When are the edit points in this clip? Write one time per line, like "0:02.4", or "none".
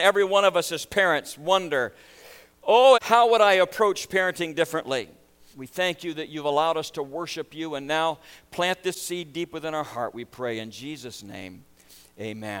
0:02.9
0:05.5